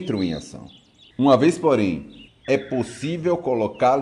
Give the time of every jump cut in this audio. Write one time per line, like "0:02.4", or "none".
0:01.1
0:02.3